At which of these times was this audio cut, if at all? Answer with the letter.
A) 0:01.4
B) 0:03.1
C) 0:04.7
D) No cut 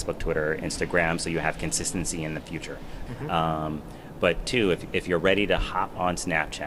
B